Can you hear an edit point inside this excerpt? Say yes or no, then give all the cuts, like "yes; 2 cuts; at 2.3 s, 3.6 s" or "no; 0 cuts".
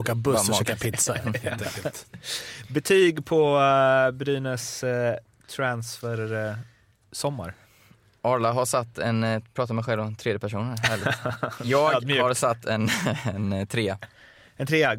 no; 0 cuts